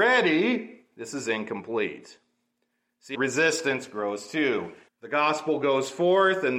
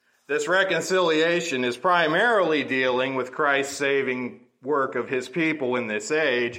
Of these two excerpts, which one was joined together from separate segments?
first; 2 cuts; at 3.1 s, 4.9 s

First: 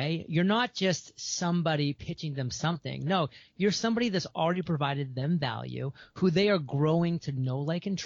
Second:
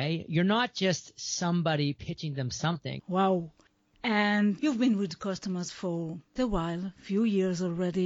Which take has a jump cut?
second; 2 cuts; at 3.0 s, 6.4 s

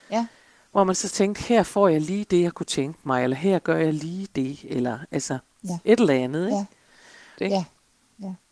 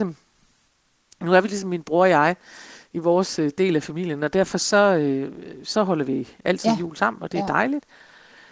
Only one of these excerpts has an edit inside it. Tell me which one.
first; 1 cut; at 7.4 s

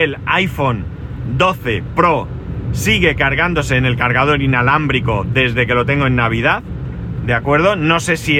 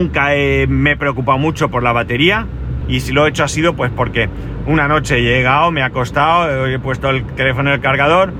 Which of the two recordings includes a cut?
second; 1 cut; at 2.8 s

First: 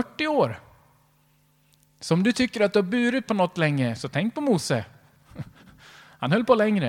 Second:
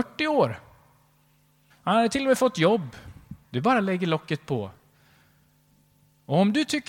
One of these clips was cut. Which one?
second; 2 cuts; at 1.7 s, 3.4 s

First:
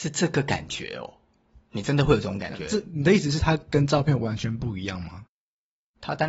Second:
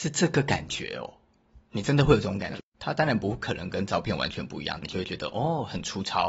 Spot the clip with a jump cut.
second; 2 cuts; at 2.6 s, 4.8 s

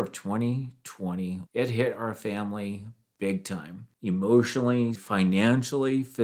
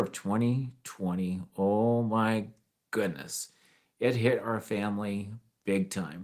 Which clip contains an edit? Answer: first; 3 cuts; at 1.5 s, 3.9 s, 5.0 s

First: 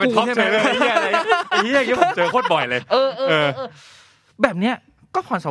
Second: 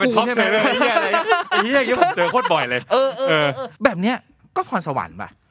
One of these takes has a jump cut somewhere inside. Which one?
second; 1 cut; at 3.7 s

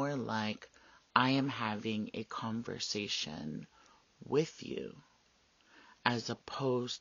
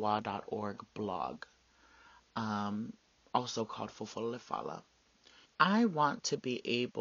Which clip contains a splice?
second; 1 cut; at 5.5 s

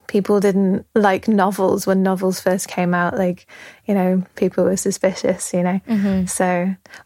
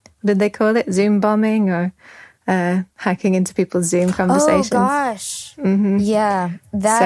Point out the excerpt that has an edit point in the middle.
first; 1 cut; at 4.4 s

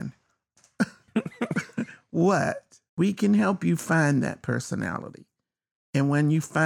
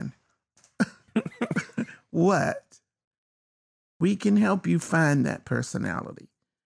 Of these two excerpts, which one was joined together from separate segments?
first; 1 cut; at 2.9 s

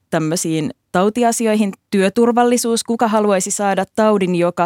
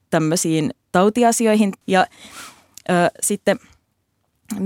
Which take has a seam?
second; 1 cut; at 1.8 s

